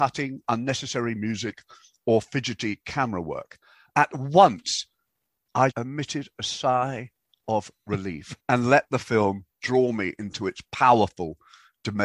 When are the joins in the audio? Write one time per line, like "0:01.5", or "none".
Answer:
0:05.7
0:08.4